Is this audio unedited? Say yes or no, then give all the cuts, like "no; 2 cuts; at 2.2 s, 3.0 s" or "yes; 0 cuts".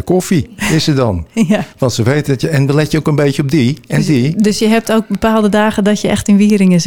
yes; 0 cuts